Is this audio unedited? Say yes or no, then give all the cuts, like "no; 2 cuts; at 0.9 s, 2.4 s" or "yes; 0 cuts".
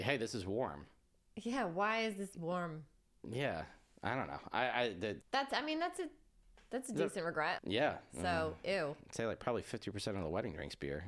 no; 2 cuts; at 5.2 s, 7.6 s